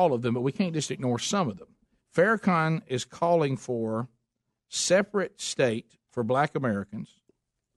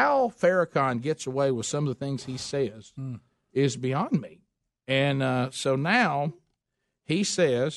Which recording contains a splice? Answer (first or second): first